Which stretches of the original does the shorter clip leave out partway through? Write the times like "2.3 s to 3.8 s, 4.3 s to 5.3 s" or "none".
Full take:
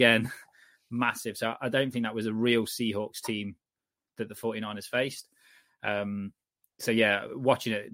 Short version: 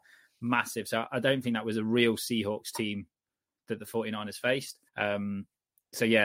5.4 s to 5.7 s